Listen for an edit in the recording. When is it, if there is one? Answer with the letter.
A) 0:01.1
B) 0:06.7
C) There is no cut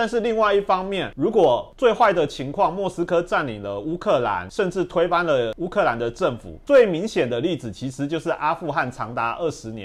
B